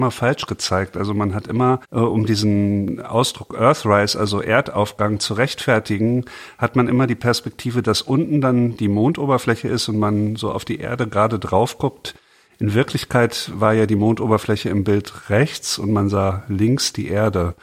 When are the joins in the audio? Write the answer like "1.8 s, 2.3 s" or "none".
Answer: 1.8 s